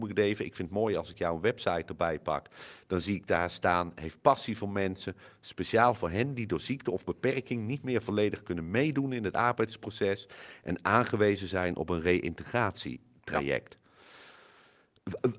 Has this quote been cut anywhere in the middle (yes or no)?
no